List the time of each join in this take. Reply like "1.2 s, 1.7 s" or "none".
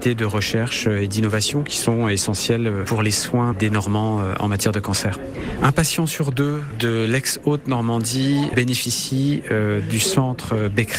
3.5 s